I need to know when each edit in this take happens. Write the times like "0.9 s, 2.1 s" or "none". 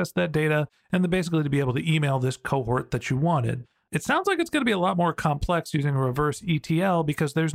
none